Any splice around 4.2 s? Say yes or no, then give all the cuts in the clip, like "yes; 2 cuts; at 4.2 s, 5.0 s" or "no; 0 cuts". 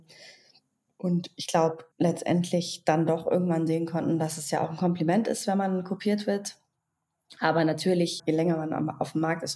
no; 2 cuts; at 1.9 s, 8.2 s